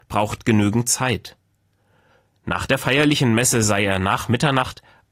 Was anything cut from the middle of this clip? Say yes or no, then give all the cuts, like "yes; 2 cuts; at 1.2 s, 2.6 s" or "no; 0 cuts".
yes; 1 cut; at 2.2 s